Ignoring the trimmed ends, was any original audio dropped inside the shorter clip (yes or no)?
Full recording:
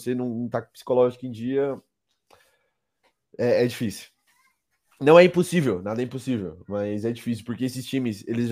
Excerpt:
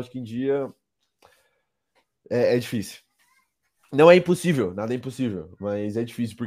no